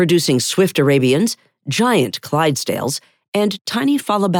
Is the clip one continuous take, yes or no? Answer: yes